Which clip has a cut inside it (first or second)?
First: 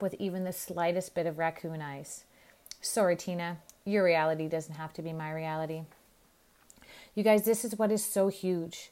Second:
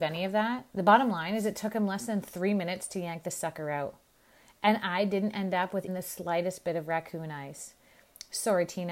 second